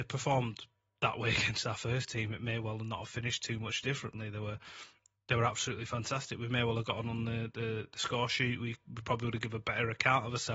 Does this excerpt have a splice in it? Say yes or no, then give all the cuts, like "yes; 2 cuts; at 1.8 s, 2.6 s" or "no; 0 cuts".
no; 0 cuts